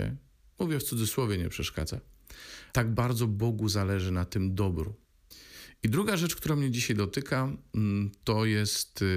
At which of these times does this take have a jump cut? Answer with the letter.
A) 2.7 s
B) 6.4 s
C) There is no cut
A